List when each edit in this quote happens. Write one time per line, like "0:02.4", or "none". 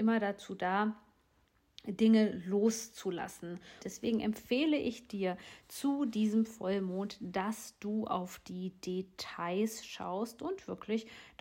0:03.8